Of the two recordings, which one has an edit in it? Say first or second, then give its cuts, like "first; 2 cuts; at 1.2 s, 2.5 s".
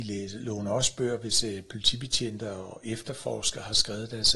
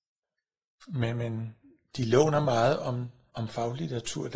second; 1 cut; at 3.3 s